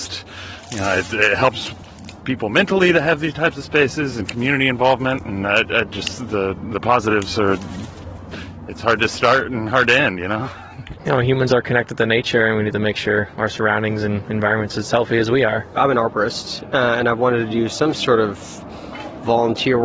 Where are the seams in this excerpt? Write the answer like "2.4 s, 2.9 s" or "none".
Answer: 11.0 s